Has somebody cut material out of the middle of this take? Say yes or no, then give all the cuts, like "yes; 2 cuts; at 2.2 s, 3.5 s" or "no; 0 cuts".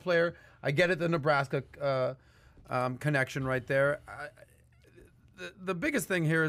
yes; 1 cut; at 5.5 s